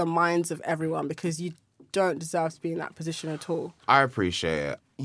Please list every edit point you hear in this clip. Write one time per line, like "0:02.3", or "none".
none